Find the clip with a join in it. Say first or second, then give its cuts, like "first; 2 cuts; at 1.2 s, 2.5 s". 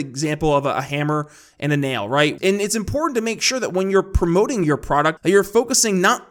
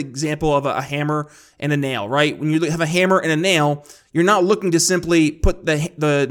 first; 2 cuts; at 2.4 s, 5.2 s